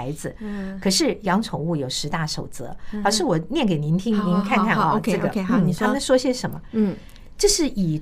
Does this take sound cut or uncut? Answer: uncut